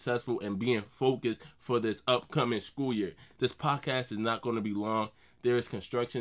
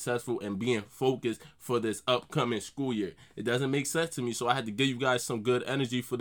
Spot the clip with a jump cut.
first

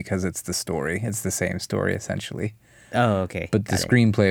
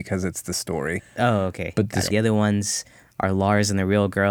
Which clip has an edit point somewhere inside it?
second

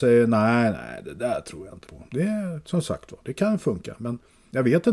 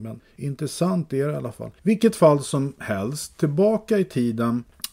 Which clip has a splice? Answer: second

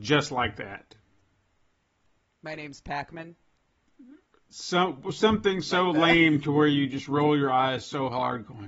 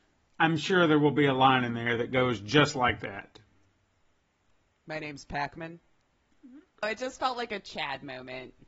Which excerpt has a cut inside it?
second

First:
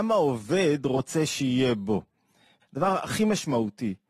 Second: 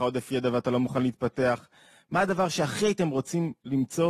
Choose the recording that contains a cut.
first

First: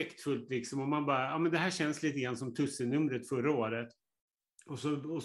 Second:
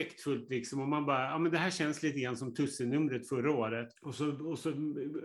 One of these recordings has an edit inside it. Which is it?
second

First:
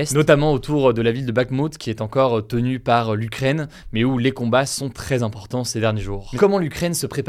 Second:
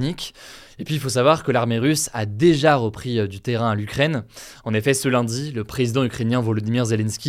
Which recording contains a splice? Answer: first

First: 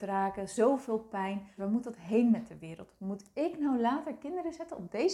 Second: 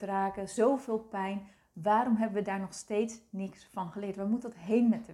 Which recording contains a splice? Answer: first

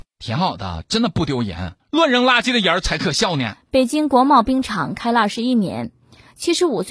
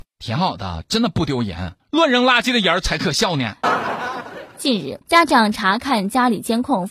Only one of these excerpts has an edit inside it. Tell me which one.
second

